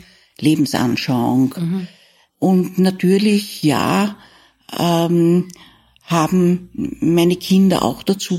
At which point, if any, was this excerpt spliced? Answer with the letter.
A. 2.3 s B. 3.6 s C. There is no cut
A